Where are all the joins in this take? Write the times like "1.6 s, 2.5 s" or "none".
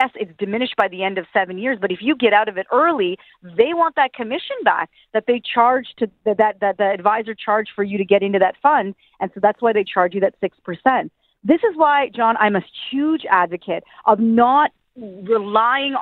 none